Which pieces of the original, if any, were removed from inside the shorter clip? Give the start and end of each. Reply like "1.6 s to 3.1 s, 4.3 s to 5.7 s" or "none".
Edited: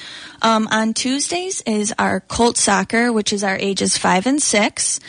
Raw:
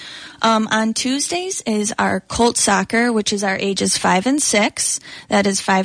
none